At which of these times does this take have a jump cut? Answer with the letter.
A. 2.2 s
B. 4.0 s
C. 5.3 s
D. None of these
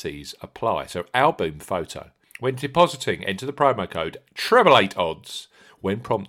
A